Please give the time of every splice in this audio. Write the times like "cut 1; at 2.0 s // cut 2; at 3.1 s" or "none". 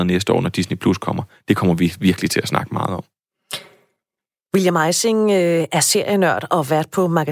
none